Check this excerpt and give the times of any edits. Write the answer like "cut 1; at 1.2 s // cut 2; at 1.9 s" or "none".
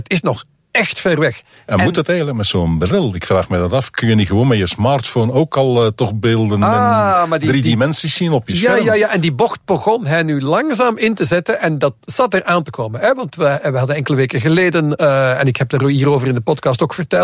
none